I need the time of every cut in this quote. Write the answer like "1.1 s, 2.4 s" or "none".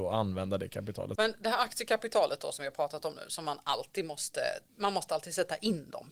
1.2 s, 4.7 s